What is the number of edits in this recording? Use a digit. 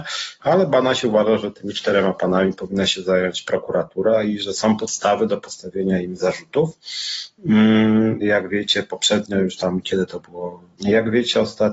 2